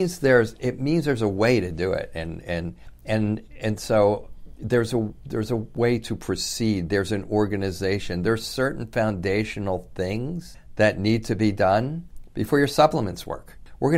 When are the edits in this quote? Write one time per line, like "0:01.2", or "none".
none